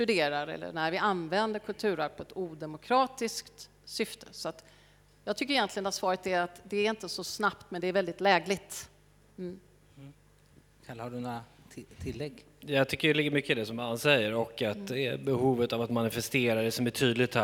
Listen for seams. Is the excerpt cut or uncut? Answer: uncut